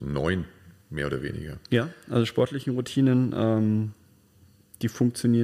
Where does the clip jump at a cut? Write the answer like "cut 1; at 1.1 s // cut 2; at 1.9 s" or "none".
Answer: cut 1; at 1.6 s